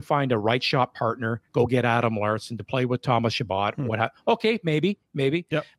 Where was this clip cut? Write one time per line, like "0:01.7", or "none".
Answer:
0:01.5